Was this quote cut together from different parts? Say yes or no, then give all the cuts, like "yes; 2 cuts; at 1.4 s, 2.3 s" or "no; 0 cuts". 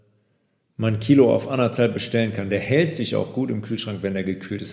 no; 0 cuts